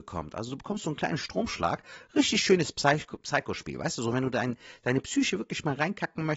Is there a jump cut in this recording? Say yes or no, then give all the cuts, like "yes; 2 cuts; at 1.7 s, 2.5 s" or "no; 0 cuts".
no; 0 cuts